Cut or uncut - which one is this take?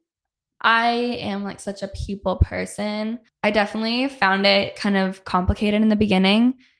cut